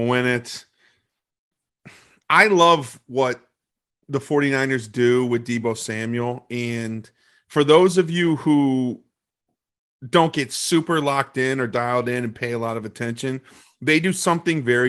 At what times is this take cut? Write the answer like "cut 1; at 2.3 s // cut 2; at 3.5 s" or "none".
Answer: cut 1; at 2.2 s